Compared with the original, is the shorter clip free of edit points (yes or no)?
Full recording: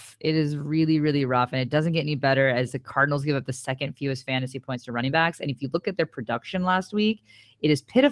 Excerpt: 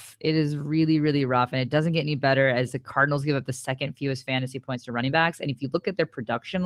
yes